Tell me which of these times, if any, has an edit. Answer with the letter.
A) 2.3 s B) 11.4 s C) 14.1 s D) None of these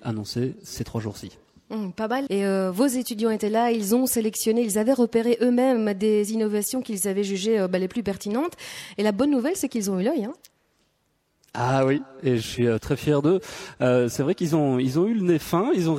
A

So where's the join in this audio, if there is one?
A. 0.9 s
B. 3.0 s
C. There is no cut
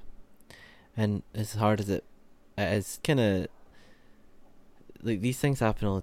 B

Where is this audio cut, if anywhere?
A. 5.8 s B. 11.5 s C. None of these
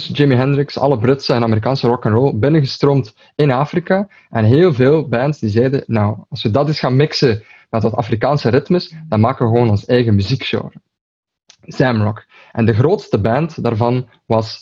C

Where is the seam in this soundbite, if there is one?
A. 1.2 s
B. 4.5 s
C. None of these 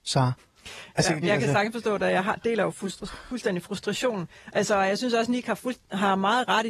A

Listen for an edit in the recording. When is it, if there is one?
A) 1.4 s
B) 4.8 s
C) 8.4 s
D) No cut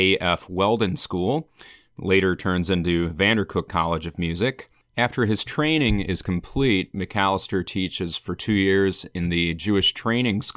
B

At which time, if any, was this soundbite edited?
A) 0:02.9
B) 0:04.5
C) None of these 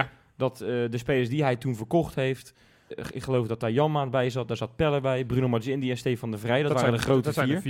A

